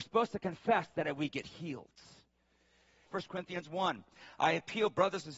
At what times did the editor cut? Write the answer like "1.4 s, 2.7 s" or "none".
3.1 s